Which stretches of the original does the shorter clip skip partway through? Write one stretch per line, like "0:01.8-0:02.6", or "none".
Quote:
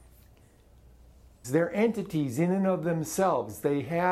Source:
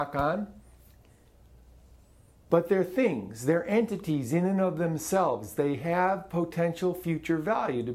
0:02.1-0:03.4